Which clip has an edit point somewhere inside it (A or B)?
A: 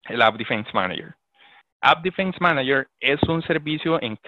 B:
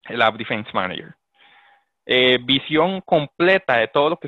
A